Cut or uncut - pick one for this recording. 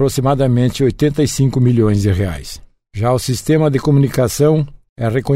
uncut